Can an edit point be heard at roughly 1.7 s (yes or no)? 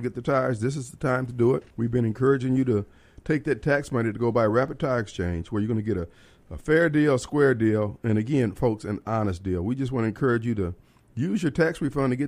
yes